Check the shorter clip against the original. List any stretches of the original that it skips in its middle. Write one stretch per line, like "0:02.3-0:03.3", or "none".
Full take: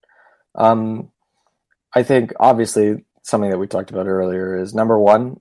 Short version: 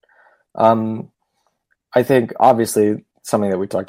none